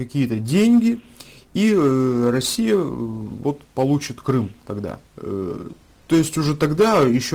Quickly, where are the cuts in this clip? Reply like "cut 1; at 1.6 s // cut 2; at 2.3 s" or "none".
cut 1; at 5.1 s